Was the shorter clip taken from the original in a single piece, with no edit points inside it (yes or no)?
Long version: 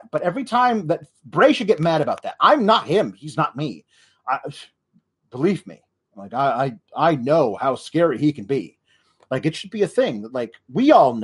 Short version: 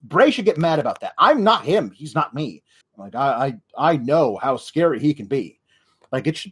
no